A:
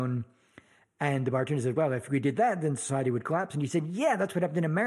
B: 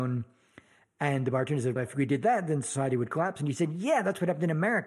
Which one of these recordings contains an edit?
B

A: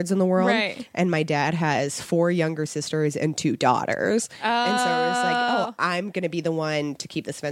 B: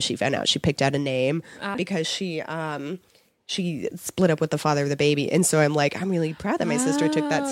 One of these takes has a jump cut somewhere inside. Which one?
B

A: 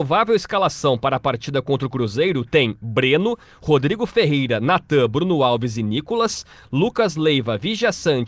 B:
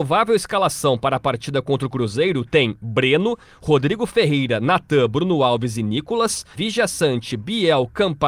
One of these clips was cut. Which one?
B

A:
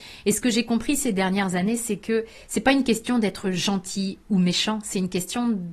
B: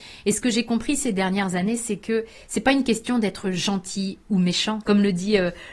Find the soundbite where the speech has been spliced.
B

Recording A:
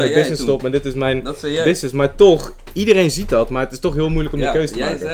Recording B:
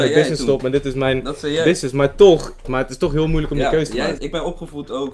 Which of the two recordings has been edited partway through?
B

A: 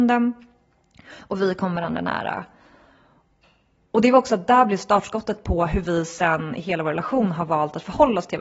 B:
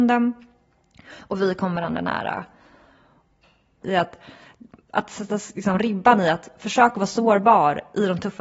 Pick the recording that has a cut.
B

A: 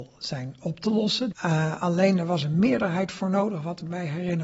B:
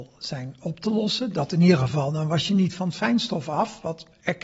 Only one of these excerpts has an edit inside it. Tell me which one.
A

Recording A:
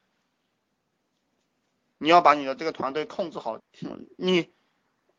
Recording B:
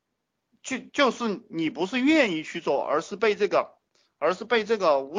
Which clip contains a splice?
A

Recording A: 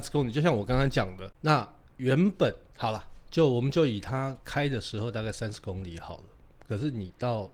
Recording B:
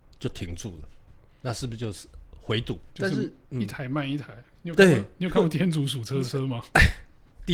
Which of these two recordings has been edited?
B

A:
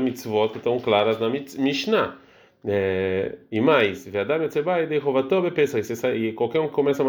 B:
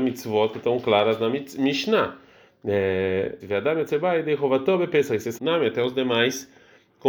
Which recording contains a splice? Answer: B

